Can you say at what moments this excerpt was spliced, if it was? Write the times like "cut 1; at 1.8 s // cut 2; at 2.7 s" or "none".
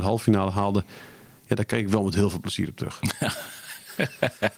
none